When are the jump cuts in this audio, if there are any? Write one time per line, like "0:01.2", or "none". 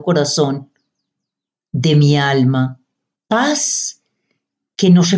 0:03.1